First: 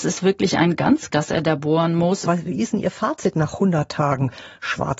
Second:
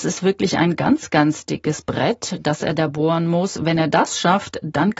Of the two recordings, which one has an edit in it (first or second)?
first